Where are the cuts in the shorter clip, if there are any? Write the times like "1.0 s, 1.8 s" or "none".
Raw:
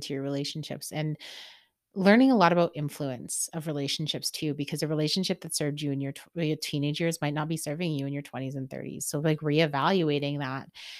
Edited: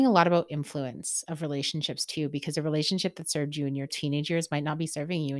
3.9 s